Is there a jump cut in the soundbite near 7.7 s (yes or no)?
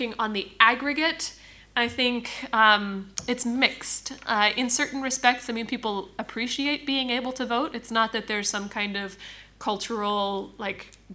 no